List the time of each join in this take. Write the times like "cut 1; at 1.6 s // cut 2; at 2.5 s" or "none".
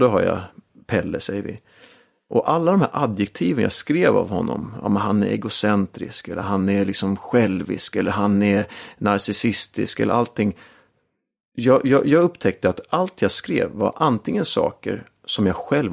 none